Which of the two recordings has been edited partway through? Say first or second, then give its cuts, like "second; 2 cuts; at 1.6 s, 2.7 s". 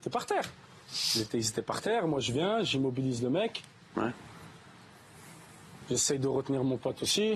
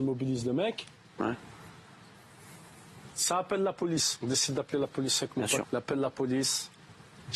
second; 2 cuts; at 3.1 s, 5.6 s